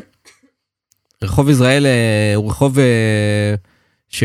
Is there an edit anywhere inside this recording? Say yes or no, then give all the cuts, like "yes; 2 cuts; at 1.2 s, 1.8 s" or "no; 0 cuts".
no; 0 cuts